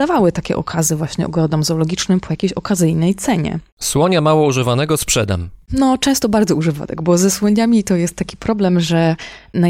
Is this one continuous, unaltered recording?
yes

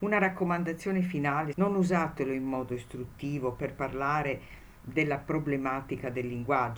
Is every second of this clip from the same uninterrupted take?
no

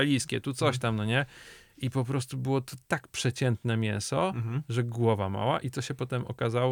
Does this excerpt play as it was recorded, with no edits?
yes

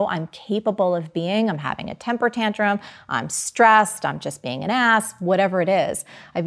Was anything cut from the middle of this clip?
no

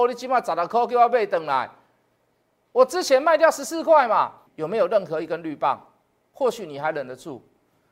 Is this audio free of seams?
no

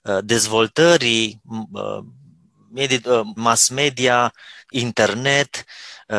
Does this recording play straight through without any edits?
no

